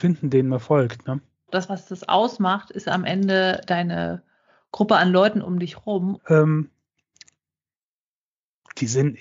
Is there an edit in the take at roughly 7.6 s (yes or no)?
no